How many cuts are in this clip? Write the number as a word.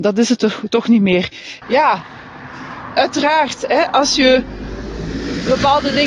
one